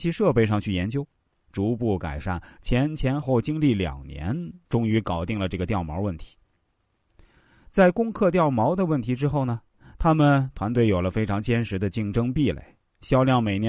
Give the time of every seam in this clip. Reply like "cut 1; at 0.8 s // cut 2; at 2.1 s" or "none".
cut 1; at 3.2 s